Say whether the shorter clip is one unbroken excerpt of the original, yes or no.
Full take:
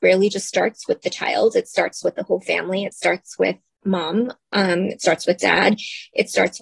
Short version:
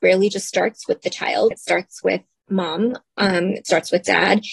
no